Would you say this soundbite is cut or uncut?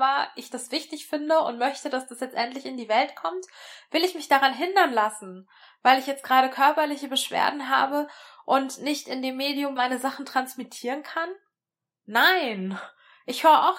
cut